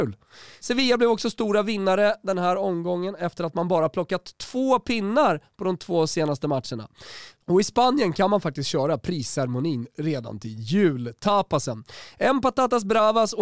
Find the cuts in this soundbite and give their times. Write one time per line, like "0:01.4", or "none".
0:07.4